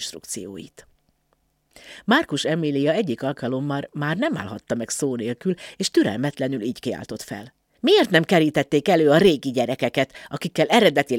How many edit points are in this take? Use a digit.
1